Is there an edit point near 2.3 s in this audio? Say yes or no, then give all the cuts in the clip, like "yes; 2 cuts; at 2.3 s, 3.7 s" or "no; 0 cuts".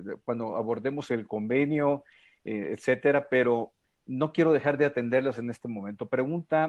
no; 0 cuts